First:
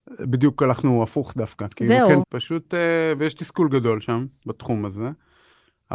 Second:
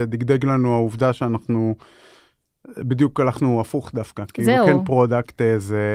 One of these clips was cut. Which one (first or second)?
first